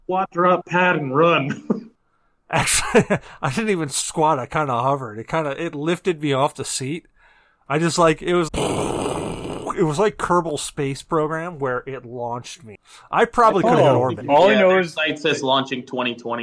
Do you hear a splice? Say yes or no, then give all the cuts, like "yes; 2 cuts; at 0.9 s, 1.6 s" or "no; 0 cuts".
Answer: yes; 2 cuts; at 8.5 s, 14.2 s